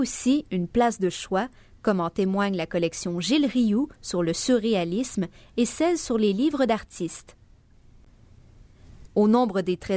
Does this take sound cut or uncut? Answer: cut